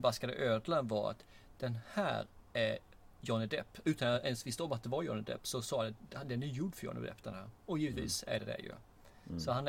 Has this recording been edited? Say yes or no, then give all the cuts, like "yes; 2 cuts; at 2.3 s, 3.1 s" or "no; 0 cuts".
no; 0 cuts